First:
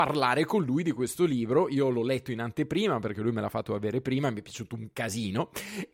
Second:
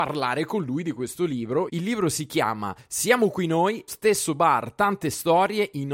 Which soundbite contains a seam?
second; 2 cuts; at 1.7 s, 3.9 s

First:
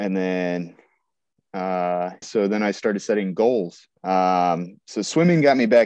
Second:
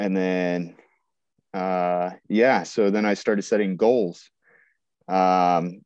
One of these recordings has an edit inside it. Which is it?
first; 2 cuts; at 2.2 s, 3.9 s

